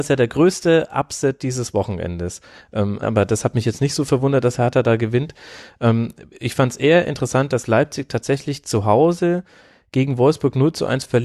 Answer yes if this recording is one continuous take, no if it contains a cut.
no